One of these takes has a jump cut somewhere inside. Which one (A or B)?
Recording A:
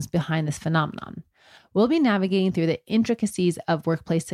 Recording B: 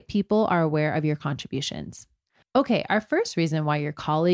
B